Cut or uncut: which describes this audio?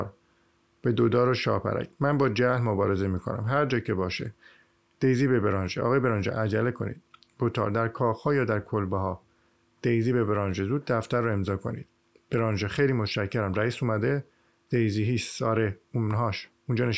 uncut